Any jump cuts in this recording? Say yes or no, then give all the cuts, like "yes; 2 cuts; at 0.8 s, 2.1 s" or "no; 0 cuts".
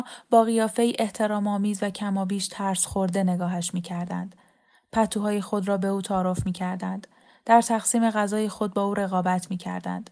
no; 0 cuts